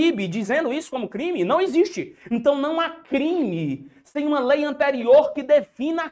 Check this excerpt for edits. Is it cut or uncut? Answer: uncut